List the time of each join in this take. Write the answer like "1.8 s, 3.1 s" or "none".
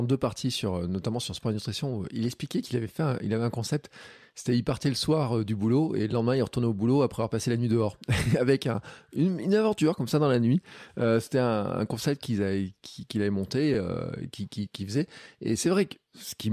none